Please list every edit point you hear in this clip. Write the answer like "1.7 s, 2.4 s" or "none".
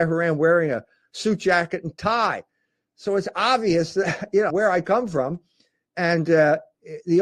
4.5 s